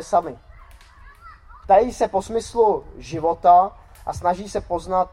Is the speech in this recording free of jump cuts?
no; 1 cut; at 1.6 s

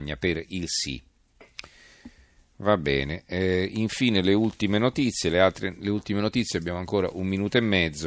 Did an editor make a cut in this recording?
no; 0 cuts

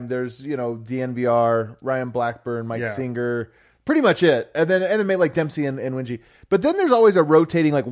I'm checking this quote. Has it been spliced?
no; 0 cuts

